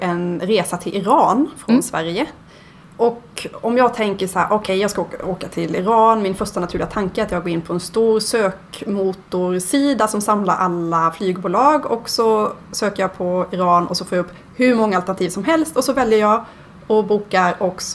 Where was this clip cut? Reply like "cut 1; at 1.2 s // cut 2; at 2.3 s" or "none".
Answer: none